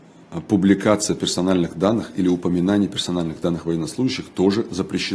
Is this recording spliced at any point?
no; 0 cuts

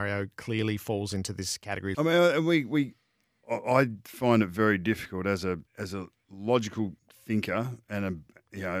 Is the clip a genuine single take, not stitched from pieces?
no; 3 cuts; at 1.9 s, 5.7 s, 7.0 s

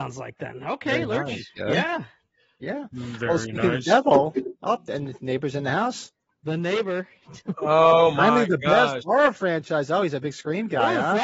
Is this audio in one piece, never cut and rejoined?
yes; 0 cuts

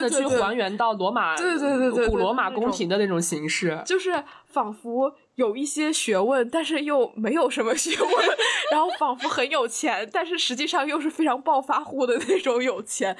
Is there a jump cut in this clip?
no; 0 cuts

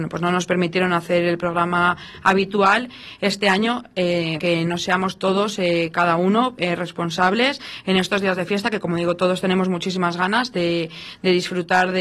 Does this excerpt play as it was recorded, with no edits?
no; 1 cut; at 4.4 s

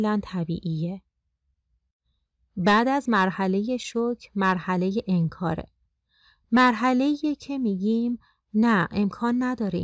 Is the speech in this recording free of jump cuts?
yes; 0 cuts

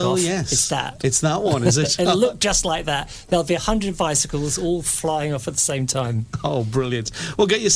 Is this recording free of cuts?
yes; 0 cuts

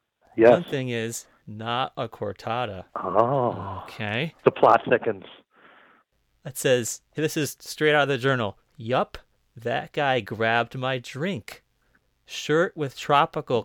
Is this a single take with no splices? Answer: no; 3 cuts; at 1.4 s, 2.9 s, 4.4 s

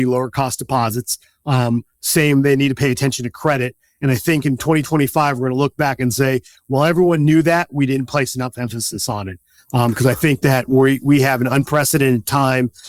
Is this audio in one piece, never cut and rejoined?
yes; 0 cuts

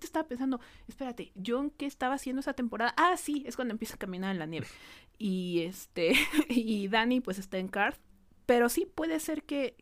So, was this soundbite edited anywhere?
no; 0 cuts

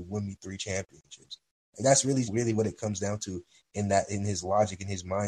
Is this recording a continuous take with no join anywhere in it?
no; 1 cut; at 2.2 s

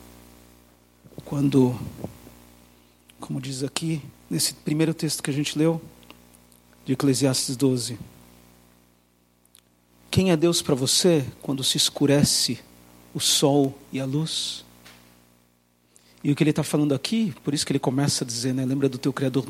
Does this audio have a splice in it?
no; 0 cuts

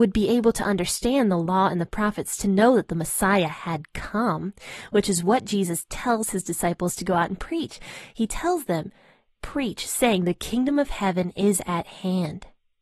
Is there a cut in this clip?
yes; 1 cut; at 9.4 s

